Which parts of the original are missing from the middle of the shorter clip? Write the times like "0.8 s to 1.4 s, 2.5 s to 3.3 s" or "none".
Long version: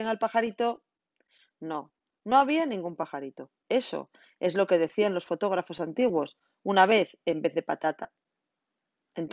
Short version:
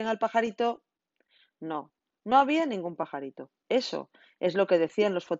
none